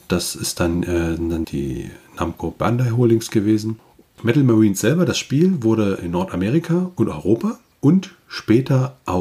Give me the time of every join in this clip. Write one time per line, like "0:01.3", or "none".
0:01.4
0:04.2

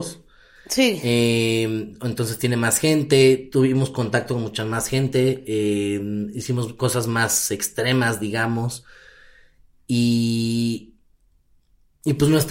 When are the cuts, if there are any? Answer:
none

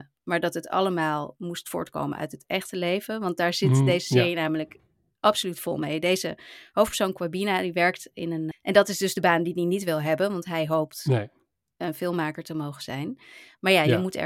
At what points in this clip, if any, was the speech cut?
0:08.5

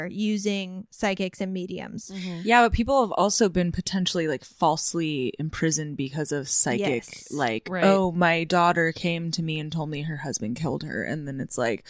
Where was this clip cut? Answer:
none

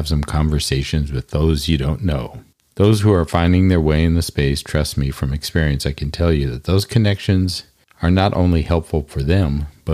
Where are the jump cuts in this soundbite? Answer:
none

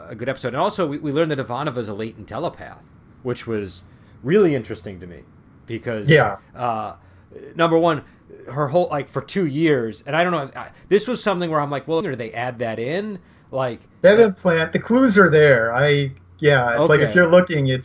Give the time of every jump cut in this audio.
0:12.0

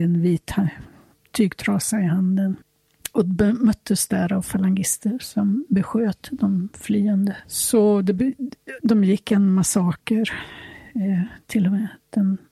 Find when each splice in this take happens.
none

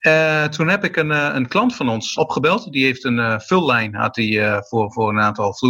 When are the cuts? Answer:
0:02.2

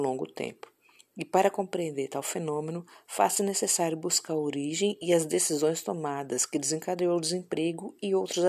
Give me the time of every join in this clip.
none

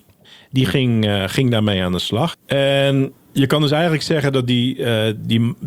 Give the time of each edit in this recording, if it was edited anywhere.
0:02.3

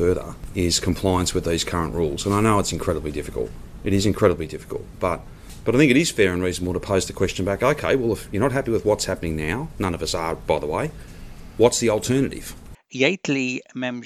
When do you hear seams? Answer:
0:12.7

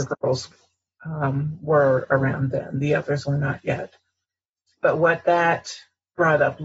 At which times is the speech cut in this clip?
0:03.2

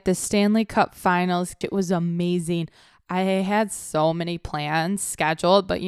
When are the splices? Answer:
0:01.6

